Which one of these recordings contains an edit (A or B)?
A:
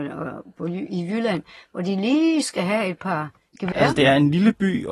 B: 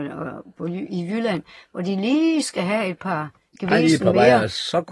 A